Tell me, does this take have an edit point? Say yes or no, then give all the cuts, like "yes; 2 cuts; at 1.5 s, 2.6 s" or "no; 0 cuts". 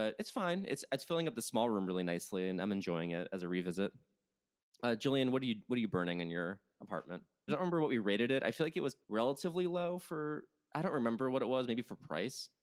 yes; 2 cuts; at 7.5 s, 9.0 s